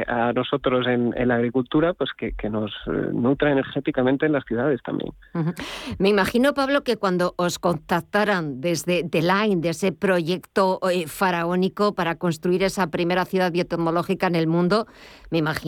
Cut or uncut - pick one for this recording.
uncut